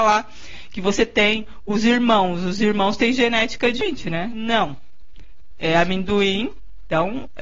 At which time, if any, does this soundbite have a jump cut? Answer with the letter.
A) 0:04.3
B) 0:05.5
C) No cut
A